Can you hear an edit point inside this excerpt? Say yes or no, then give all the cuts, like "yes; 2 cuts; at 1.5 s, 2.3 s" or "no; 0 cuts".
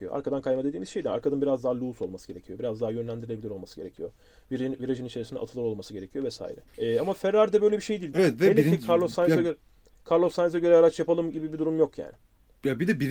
yes; 2 cuts; at 6.7 s, 8.1 s